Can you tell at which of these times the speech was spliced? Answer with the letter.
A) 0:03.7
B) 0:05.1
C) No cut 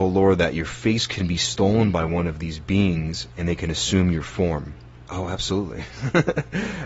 B